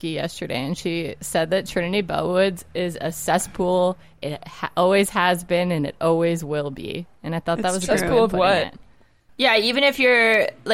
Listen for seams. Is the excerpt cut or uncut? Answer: cut